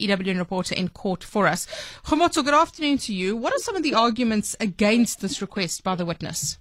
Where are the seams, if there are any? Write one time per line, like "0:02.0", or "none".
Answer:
none